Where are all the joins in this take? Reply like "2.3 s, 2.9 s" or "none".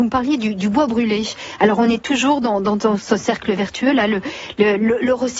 none